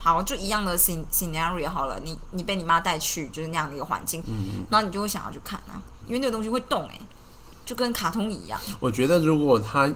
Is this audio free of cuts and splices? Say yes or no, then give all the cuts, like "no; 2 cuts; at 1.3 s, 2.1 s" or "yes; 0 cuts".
no; 3 cuts; at 2.2 s, 4.2 s, 6.0 s